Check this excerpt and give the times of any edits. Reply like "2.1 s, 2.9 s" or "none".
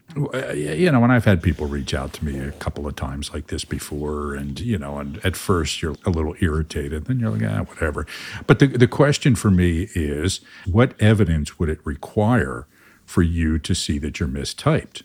5.9 s, 10.6 s